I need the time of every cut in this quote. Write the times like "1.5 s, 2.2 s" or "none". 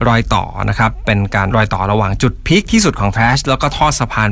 1.5 s

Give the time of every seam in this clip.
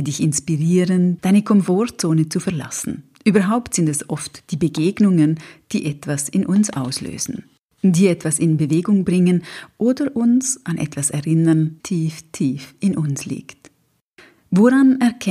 1.2 s, 11.8 s

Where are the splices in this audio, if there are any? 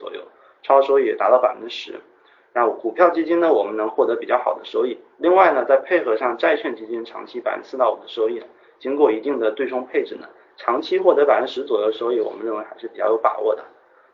none

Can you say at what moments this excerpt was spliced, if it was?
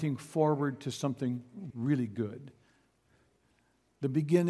1.7 s

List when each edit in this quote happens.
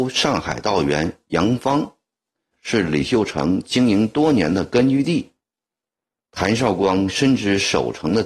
2.5 s

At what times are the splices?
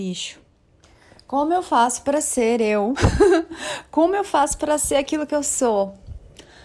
none

